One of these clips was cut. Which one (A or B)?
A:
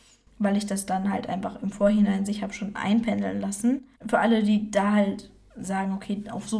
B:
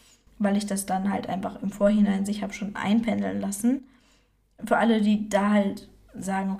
A